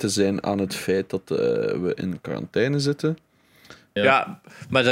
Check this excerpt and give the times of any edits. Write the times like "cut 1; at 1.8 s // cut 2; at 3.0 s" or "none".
cut 1; at 4.0 s